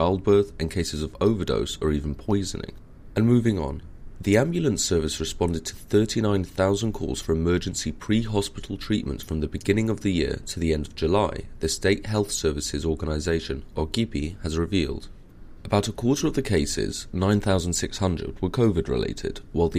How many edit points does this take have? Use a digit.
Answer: 1